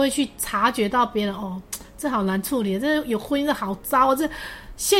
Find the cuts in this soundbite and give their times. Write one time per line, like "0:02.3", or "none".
none